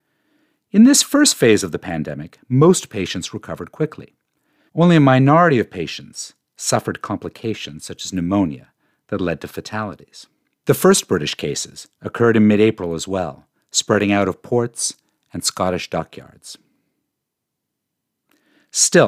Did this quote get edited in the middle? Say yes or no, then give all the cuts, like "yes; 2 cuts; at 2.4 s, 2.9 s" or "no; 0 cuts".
yes; 2 cuts; at 4.7 s, 10.6 s